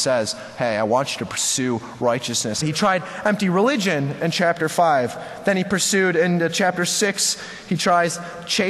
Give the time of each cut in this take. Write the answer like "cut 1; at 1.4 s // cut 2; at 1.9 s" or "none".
cut 1; at 2.6 s